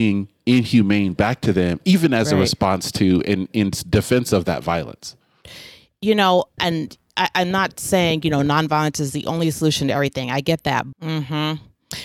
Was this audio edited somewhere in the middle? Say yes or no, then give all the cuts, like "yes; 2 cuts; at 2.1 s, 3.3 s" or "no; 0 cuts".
yes; 2 cuts; at 6.6 s, 10.9 s